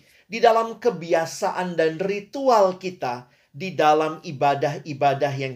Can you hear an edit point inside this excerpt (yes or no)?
no